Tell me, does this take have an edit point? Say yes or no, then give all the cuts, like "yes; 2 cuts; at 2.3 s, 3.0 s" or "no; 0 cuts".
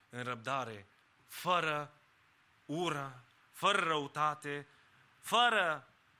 no; 0 cuts